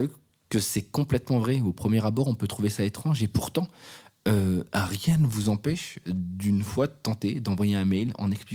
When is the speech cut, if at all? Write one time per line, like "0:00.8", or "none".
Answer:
none

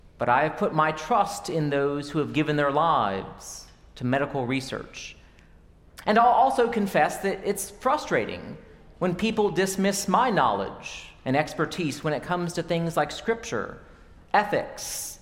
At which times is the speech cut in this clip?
none

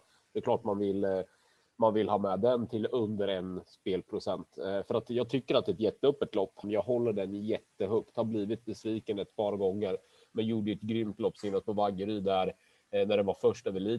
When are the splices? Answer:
0:06.6

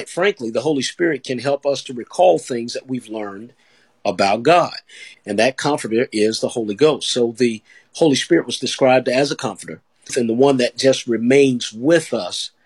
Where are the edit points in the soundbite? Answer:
0:05.1
0:10.1

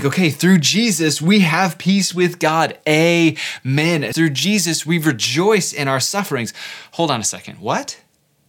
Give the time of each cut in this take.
0:04.1

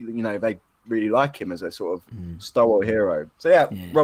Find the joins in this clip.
none

